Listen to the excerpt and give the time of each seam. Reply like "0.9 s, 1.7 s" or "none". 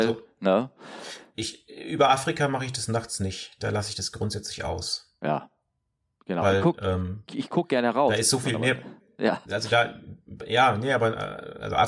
none